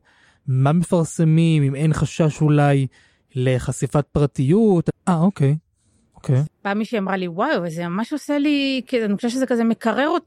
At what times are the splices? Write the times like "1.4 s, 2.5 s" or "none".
4.9 s, 6.5 s